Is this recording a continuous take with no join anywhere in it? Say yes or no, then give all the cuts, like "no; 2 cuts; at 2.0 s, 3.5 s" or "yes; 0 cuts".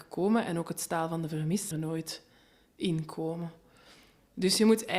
no; 1 cut; at 1.7 s